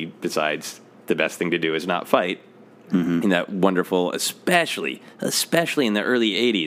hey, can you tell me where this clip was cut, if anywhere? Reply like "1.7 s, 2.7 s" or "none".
none